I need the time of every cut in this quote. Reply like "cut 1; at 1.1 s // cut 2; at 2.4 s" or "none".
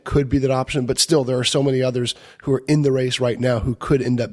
none